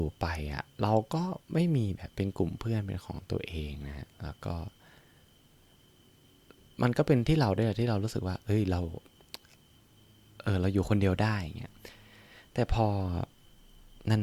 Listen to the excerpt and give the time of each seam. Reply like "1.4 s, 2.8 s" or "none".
none